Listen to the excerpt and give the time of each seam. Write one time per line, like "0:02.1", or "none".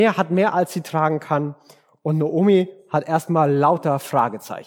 none